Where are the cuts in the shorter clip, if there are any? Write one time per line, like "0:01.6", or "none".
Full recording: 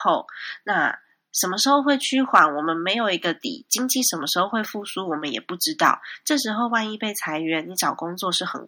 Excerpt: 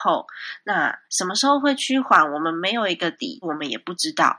0:01.1
0:03.4